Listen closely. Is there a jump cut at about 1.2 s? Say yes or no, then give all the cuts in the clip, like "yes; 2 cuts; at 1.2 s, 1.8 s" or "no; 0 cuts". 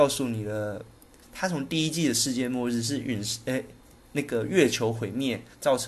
yes; 1 cut; at 1.2 s